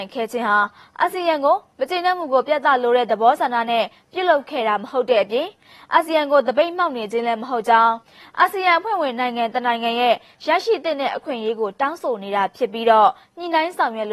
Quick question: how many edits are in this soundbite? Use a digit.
0